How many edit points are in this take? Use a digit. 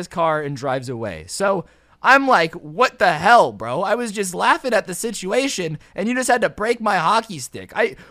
0